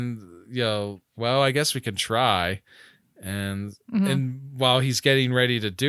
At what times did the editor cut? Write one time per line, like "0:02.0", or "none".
0:01.1
0:03.8